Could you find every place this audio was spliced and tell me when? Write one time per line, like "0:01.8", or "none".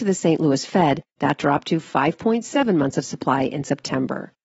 0:01.1